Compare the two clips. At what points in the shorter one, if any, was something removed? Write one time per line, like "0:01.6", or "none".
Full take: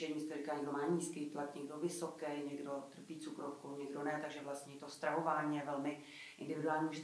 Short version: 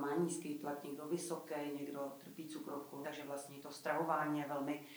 0:03.0